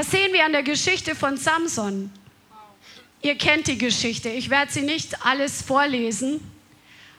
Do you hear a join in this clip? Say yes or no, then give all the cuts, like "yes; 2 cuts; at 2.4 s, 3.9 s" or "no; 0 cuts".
yes; 1 cut; at 3.1 s